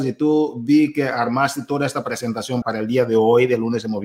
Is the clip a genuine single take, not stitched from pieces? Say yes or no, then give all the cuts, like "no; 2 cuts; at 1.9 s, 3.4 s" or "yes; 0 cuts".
no; 1 cut; at 2.6 s